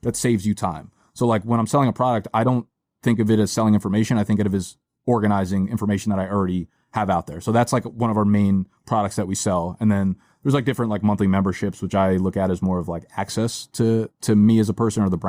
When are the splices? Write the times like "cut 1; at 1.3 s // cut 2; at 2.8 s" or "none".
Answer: none